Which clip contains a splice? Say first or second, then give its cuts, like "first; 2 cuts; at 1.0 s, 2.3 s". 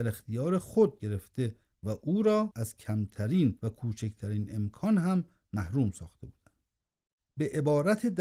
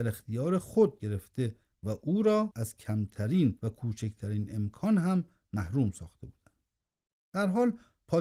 first; 1 cut; at 7.2 s